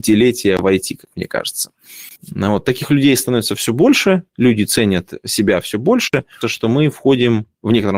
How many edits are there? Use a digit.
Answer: 2